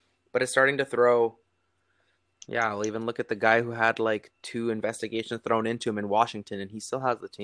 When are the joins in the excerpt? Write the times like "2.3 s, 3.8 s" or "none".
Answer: 2.3 s